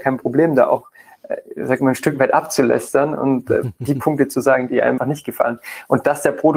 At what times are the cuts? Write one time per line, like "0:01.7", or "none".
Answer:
0:05.0

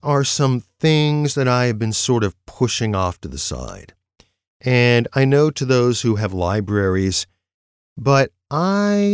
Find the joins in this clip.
0:07.9

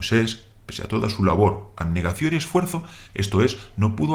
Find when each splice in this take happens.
0:03.1

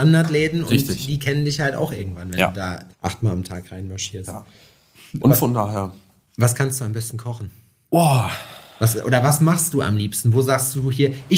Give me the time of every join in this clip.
0:02.9

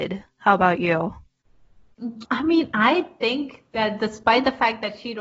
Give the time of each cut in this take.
0:02.2

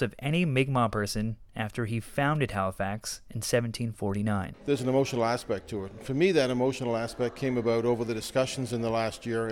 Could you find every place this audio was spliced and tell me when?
none

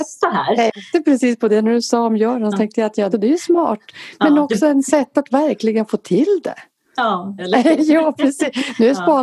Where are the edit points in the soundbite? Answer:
0:03.1
0:07.4

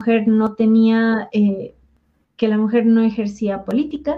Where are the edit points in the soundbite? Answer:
0:02.2

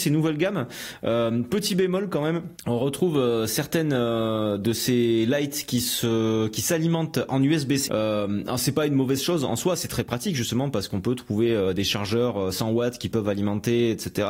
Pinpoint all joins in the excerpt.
0:02.6
0:07.9

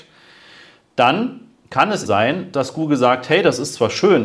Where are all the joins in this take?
0:02.1

